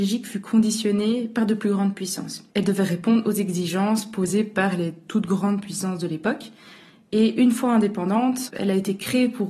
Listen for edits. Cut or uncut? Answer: cut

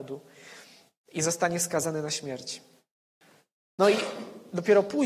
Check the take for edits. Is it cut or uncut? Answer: cut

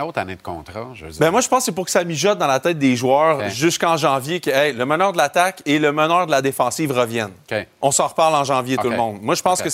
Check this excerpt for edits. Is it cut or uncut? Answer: uncut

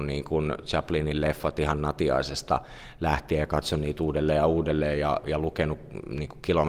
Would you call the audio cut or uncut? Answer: uncut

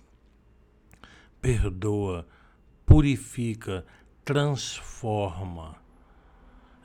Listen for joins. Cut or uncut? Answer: uncut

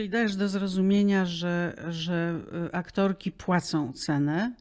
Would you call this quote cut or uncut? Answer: uncut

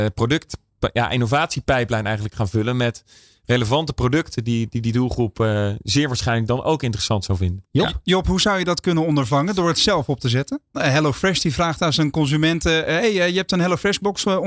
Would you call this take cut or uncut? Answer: cut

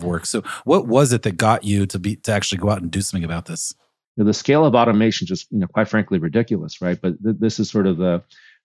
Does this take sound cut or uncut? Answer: cut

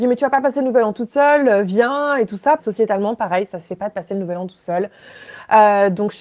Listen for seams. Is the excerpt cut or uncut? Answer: cut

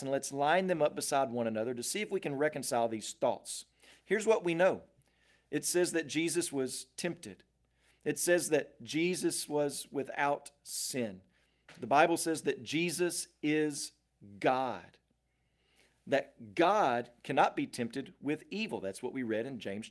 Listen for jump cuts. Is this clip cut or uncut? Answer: uncut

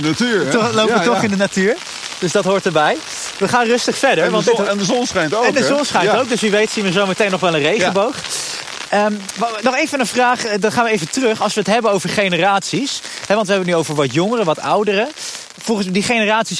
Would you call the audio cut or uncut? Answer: uncut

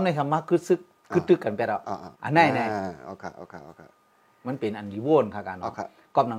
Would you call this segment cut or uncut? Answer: cut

